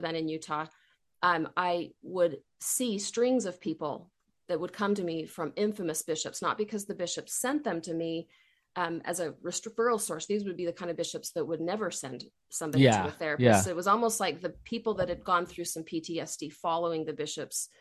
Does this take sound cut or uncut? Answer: uncut